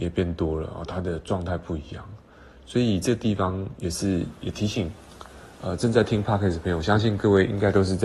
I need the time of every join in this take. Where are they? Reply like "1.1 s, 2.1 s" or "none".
none